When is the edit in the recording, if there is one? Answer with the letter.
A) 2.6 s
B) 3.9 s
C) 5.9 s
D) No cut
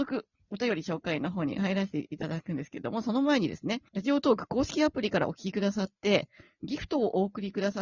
B